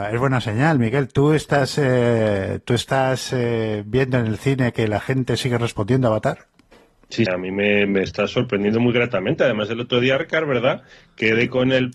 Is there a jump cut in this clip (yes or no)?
yes